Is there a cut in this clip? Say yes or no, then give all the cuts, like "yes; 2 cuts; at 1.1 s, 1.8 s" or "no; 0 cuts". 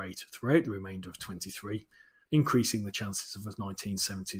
yes; 1 cut; at 2.2 s